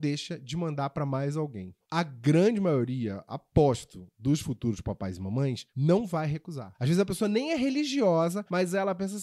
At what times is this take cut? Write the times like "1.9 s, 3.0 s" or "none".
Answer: 1.9 s

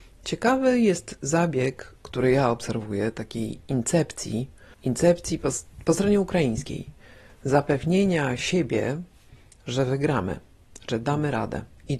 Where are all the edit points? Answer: none

